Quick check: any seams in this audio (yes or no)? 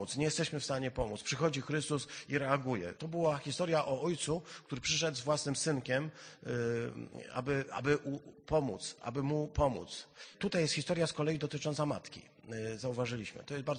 yes